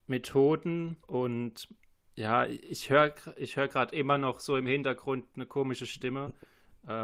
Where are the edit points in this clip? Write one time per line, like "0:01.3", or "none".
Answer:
0:01.0